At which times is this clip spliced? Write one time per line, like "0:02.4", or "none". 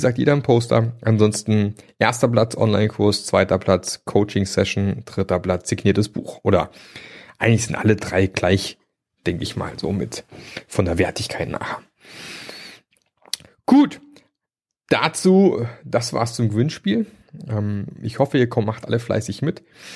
none